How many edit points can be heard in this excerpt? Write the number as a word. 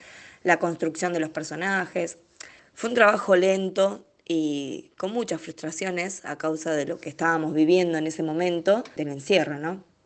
two